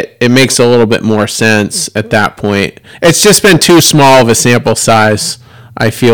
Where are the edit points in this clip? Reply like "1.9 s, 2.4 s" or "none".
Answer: none